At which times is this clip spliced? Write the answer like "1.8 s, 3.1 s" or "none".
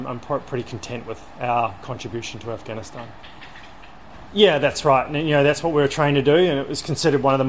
4.3 s